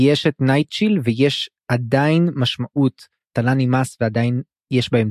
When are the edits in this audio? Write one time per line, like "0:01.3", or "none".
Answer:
none